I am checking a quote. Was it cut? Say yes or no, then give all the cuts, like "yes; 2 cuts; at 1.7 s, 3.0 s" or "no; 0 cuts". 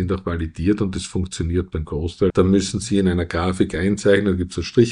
yes; 1 cut; at 2.3 s